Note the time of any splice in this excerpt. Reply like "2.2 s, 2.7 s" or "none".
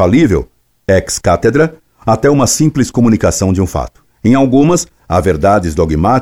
4.1 s